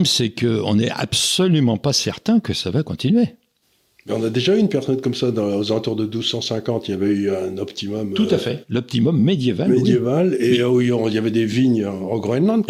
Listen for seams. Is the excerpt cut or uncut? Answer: uncut